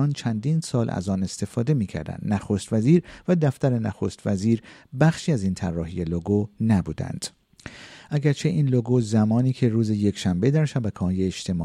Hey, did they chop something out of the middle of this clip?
no; 0 cuts

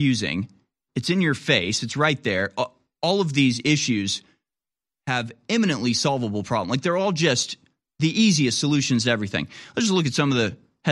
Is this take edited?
no; 0 cuts

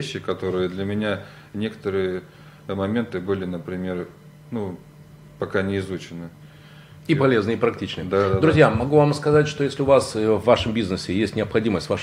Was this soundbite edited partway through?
no; 0 cuts

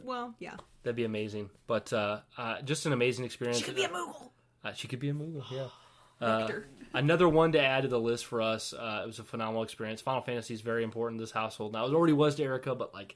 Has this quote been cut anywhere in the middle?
no; 0 cuts

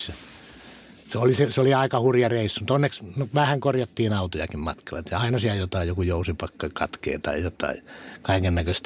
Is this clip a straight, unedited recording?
yes; 0 cuts

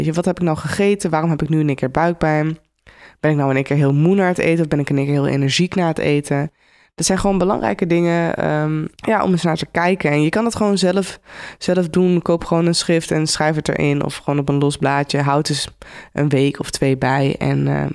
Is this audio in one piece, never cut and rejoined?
no; 1 cut; at 9.0 s

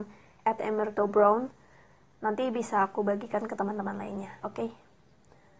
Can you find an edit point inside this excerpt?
no; 0 cuts

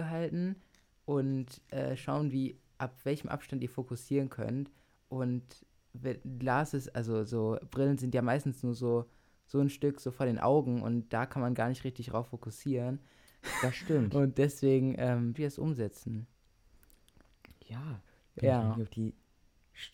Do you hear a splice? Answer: yes; 2 cuts; at 15.3 s, 18.1 s

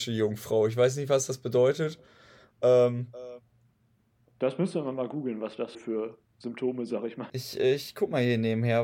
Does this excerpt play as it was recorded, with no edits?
no; 2 cuts; at 5.7 s, 7.3 s

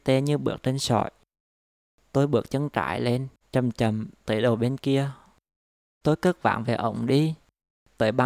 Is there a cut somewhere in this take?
yes; 2 cuts; at 3.4 s, 6.0 s

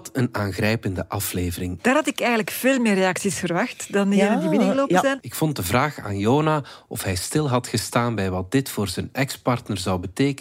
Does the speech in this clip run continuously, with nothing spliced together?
no; 2 cuts; at 1.8 s, 5.2 s

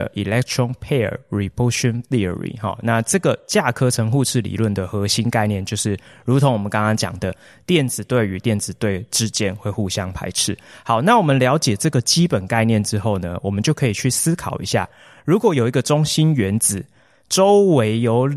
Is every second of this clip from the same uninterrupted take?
yes; 0 cuts

